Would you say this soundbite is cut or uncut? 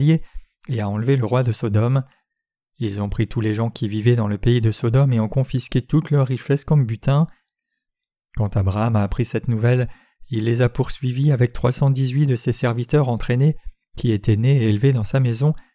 uncut